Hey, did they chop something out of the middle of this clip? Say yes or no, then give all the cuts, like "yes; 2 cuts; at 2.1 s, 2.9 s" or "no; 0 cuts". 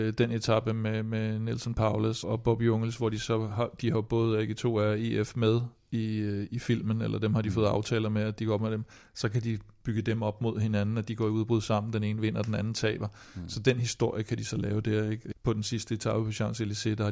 yes; 2 cuts; at 2.2 s, 15.3 s